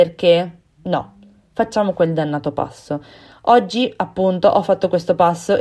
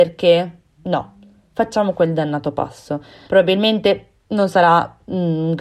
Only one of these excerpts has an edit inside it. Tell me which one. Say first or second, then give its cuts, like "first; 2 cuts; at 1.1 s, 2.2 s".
second; 1 cut; at 3.3 s